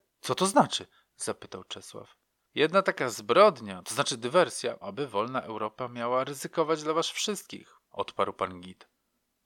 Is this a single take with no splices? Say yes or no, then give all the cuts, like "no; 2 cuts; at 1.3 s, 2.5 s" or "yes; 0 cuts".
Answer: no; 2 cuts; at 4.8 s, 7.8 s